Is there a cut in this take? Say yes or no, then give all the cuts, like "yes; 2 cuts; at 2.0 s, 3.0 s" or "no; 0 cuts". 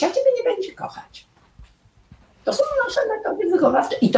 no; 0 cuts